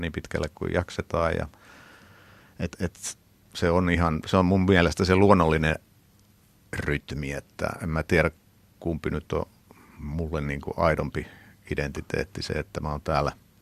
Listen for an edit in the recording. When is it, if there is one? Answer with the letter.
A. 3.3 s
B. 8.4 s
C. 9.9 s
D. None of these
A